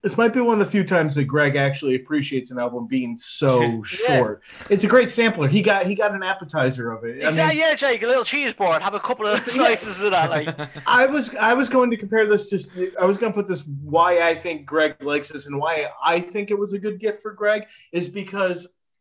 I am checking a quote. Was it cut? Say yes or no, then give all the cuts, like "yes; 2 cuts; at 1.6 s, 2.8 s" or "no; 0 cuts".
no; 0 cuts